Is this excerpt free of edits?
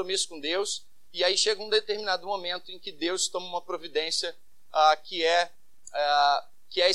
yes; 0 cuts

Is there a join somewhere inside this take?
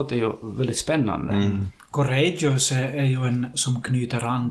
yes; 2 cuts; at 1.8 s, 3.5 s

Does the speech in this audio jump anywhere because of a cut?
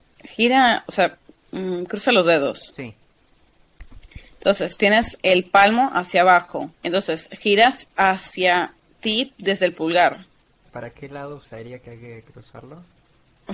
yes; 2 cuts; at 6.7 s, 10.6 s

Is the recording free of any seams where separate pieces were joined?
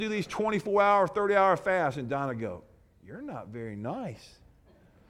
yes; 0 cuts

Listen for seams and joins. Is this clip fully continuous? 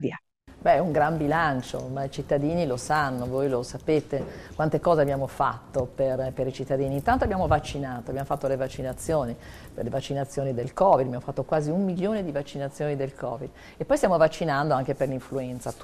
yes; 0 cuts

